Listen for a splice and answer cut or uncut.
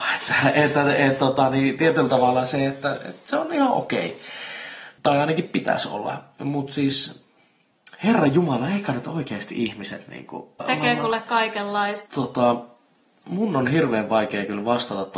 cut